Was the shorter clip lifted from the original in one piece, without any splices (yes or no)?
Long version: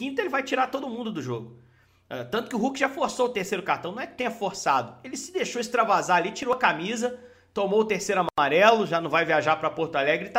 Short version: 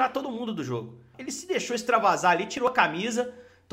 no